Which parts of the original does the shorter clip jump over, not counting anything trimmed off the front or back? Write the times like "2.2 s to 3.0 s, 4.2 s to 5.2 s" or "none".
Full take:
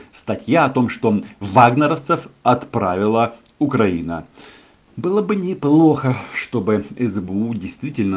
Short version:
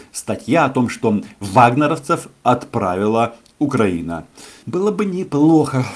4.6 s to 4.9 s

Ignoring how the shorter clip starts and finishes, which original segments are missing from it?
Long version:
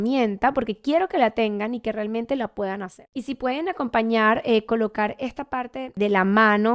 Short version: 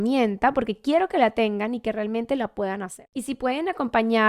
none

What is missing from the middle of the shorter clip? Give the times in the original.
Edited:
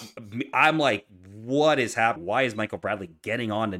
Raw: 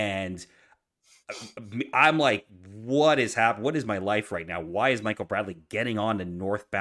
3.6 s to 4.6 s

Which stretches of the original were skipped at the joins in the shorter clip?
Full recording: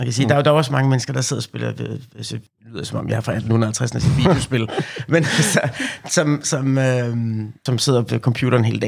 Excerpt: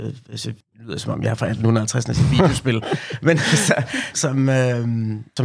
6.0 s to 6.4 s

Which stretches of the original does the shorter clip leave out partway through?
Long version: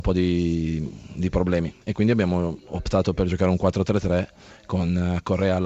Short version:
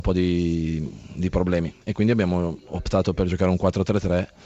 none

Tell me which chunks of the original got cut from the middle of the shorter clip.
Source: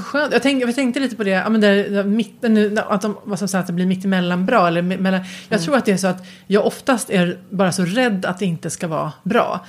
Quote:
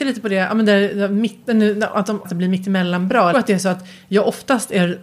3.2 s to 3.6 s, 4.7 s to 5.7 s

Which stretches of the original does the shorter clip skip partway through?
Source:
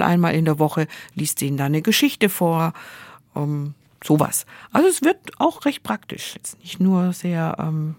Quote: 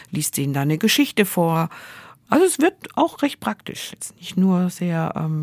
3.3 s to 4.7 s

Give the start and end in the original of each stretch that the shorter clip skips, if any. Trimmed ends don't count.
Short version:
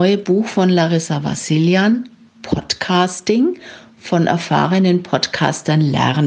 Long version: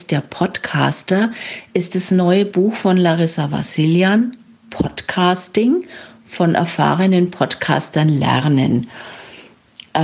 none

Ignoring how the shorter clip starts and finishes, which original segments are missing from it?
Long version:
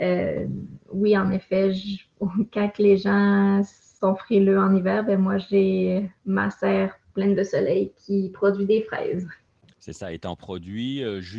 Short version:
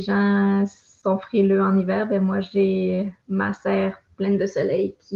none

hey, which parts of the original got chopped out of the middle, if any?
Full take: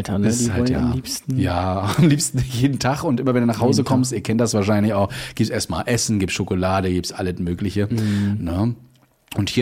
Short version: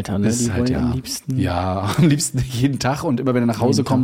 none

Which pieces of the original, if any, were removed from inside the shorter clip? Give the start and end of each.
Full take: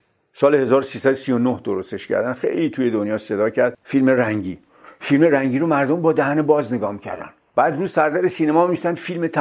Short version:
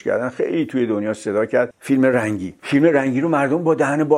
4.6 s to 5.0 s

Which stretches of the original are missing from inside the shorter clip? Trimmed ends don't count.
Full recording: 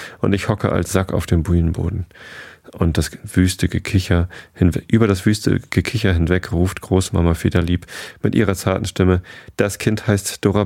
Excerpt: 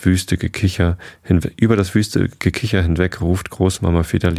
none

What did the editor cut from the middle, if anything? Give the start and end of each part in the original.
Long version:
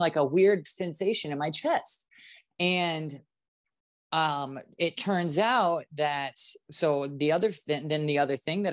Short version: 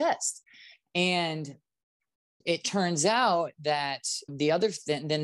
4.0 s to 4.7 s, 6.6 s to 7.1 s

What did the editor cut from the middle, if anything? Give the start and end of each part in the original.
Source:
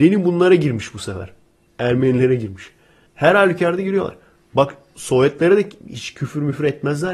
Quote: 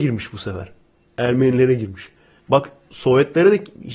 3.0 s to 4.4 s

